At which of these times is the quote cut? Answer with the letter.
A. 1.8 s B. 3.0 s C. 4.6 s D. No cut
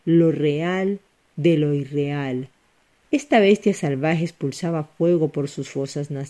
B